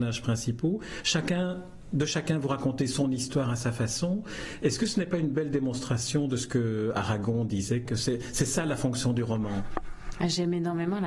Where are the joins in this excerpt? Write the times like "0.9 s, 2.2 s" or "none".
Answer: 7.9 s